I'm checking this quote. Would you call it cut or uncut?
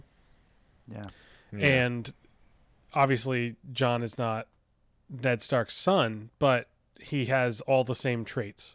cut